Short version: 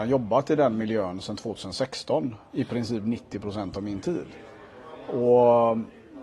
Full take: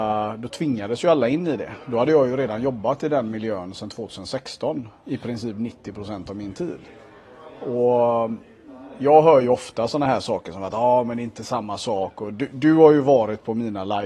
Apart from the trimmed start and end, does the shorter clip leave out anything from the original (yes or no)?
no